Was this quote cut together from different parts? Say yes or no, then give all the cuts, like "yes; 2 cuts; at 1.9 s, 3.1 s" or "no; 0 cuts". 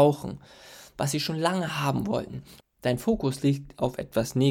yes; 1 cut; at 2.6 s